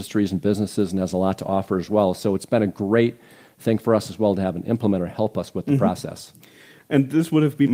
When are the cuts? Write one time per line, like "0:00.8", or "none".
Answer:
none

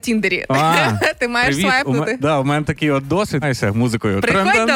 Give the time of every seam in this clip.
0:03.4

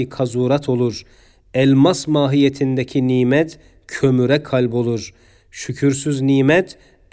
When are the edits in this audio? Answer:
0:05.4

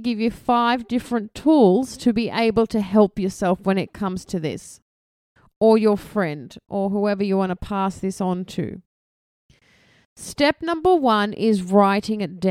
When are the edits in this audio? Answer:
none

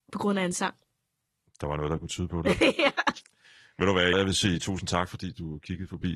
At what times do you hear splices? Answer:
0:01.5
0:04.1

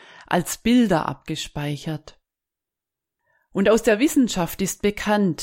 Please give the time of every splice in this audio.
none

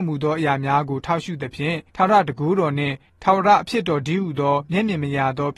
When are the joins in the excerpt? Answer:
0:01.9

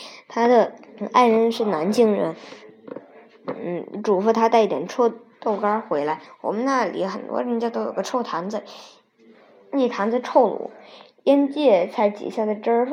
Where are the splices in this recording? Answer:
0:06.3

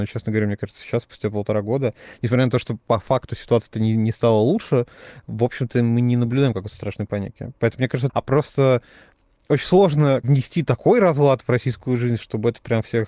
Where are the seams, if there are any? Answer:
0:08.1
0:10.2

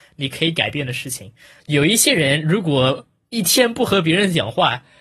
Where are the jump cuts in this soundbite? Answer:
0:01.6

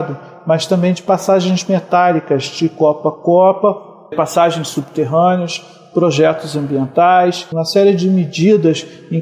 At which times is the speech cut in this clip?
0:04.1
0:07.5

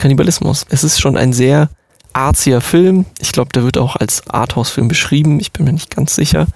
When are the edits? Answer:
none

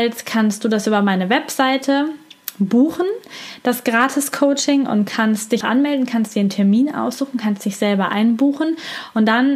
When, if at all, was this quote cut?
0:05.6

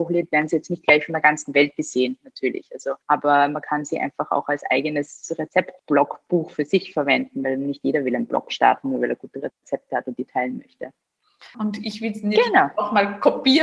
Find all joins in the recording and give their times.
0:03.0
0:05.8
0:11.5

